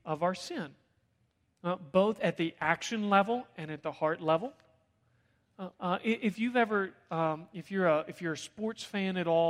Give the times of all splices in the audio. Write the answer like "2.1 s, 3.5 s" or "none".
5.7 s